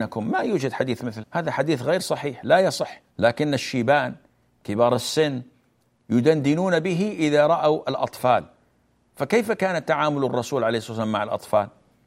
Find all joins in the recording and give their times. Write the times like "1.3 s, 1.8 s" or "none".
1.2 s, 3.1 s